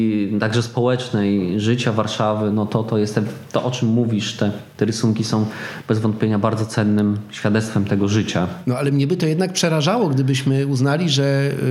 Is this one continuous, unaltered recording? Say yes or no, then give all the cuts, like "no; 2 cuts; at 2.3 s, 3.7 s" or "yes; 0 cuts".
yes; 0 cuts